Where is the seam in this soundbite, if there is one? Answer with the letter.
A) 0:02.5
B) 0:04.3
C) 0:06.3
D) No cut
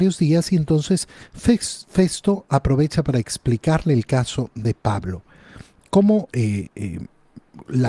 C